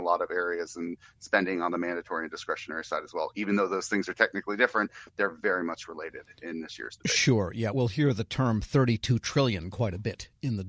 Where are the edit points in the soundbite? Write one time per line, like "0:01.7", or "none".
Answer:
none

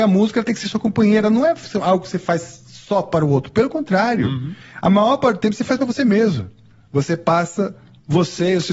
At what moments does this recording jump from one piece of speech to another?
none

